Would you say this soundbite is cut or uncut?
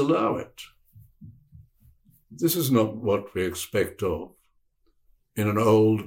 uncut